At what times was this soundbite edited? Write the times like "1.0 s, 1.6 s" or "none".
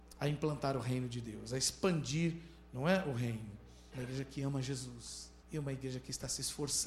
3.9 s, 5.4 s